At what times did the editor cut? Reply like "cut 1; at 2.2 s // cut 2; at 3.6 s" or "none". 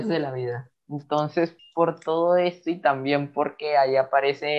cut 1; at 1.6 s